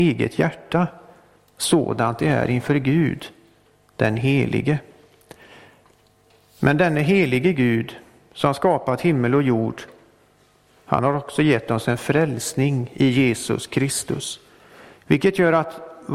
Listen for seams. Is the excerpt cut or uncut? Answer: uncut